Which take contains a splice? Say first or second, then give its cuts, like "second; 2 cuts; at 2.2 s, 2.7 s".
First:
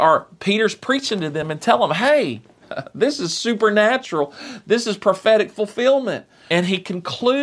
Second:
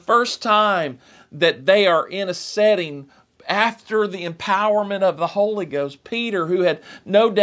first; 1 cut; at 6.5 s